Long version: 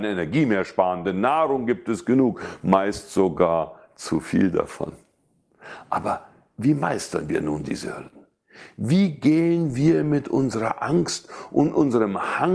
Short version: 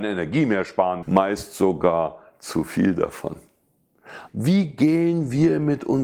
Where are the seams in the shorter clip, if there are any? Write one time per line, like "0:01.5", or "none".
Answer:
0:01.0
0:04.3